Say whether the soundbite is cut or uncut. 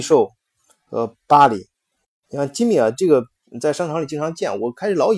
uncut